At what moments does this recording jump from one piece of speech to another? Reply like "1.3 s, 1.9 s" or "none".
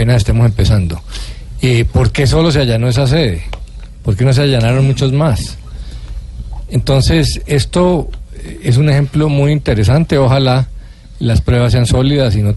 none